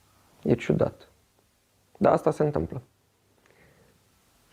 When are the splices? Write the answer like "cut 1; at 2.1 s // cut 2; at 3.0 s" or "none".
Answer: none

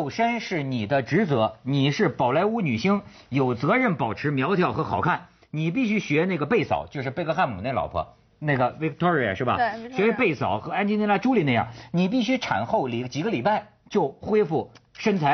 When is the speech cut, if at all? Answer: none

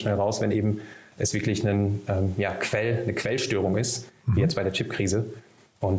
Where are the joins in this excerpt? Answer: none

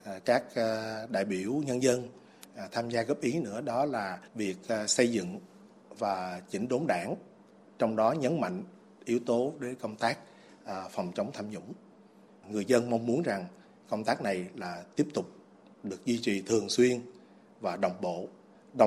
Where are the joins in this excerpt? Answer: cut 1; at 4.3 s

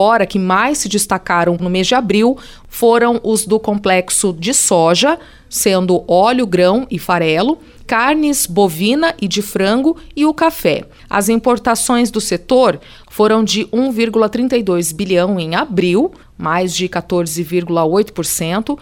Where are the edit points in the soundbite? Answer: none

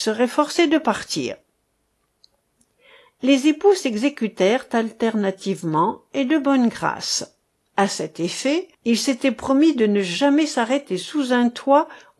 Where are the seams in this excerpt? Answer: cut 1; at 7.6 s // cut 2; at 8.7 s

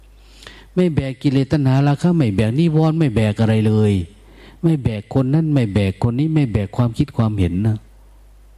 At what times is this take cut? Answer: none

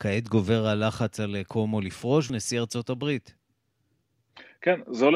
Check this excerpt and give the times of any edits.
cut 1; at 2.3 s

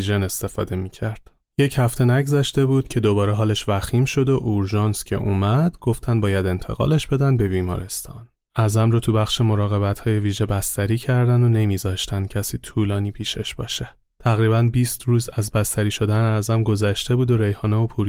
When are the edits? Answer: cut 1; at 8.5 s

